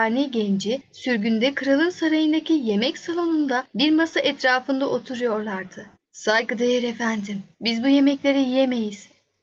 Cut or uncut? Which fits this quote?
cut